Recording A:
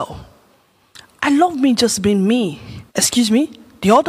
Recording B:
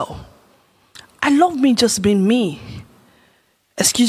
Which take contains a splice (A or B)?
A